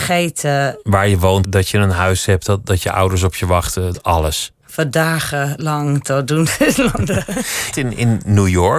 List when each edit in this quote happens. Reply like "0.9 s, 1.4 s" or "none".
1.4 s, 3.9 s, 7.7 s